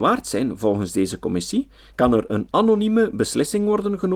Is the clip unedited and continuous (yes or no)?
no